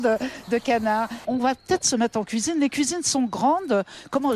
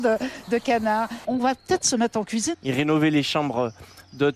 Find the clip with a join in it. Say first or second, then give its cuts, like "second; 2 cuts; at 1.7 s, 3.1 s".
second; 1 cut; at 2.5 s